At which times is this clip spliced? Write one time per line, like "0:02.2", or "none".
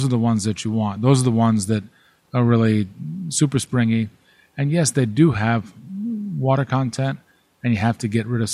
none

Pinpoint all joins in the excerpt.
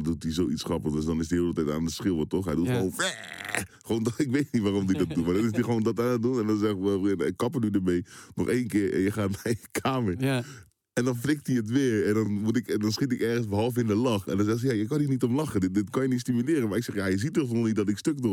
none

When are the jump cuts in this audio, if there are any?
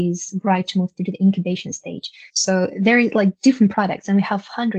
0:02.3

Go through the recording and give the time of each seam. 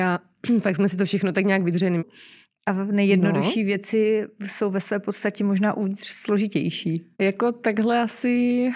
0:02.0
0:07.1

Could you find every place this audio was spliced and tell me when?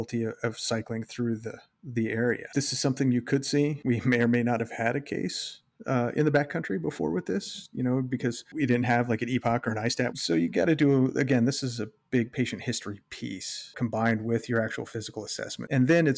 0:10.1

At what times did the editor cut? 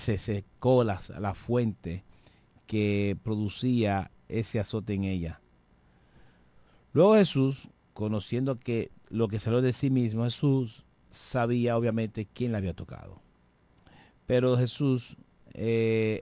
none

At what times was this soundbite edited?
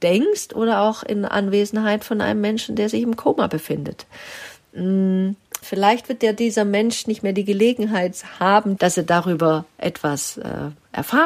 0:05.6
0:08.8

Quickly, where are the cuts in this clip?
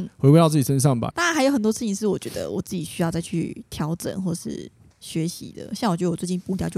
0:01.1

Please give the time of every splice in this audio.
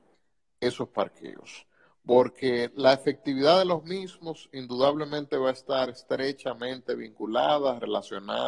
none

